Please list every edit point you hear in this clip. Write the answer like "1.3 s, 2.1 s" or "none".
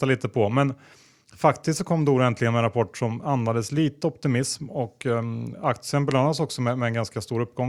5.5 s